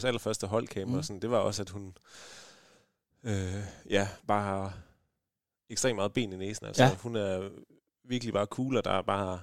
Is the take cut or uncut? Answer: uncut